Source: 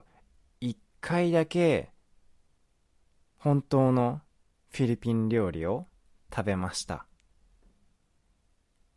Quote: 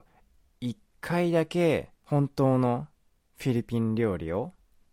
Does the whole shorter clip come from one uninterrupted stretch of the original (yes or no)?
no